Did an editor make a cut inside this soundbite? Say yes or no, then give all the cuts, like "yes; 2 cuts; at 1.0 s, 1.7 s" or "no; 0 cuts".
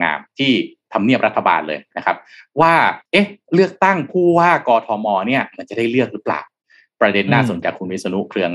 yes; 2 cuts; at 3.1 s, 7.6 s